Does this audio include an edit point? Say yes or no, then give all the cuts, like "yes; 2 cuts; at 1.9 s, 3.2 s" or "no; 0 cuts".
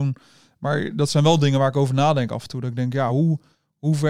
no; 0 cuts